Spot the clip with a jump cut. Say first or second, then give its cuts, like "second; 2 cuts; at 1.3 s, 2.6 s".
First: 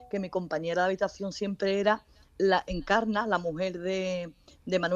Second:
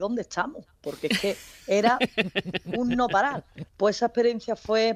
second; 1 cut; at 3.7 s